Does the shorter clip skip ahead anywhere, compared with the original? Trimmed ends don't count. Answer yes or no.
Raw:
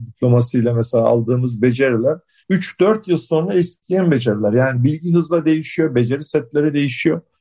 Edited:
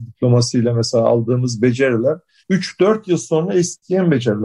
no